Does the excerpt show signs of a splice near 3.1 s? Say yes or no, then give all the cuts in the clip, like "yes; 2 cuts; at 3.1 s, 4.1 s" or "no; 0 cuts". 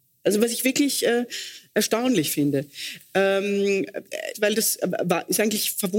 no; 2 cuts; at 1.7 s, 4.3 s